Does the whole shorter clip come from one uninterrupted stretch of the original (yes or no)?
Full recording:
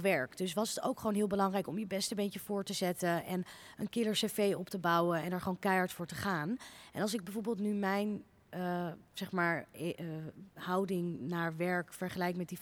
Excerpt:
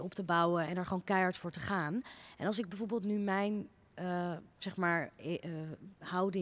yes